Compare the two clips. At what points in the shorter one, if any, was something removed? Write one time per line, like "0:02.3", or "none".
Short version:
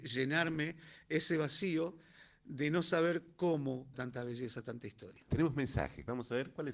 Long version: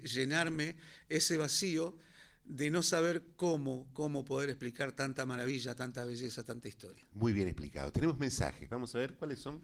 0:03.9
0:05.3